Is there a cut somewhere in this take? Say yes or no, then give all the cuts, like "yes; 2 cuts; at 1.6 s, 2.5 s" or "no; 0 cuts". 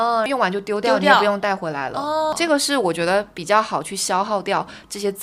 no; 0 cuts